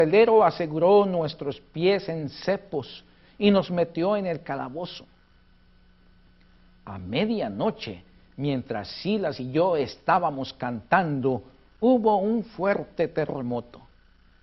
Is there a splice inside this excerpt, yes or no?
no